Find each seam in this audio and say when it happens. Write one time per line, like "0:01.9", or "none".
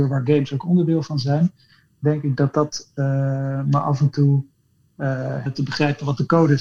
0:05.5